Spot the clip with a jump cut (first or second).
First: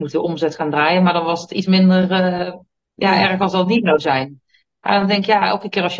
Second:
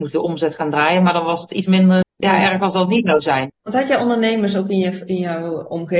second